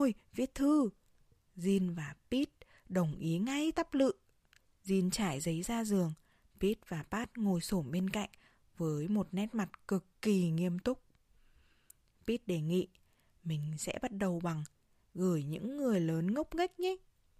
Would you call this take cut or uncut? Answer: uncut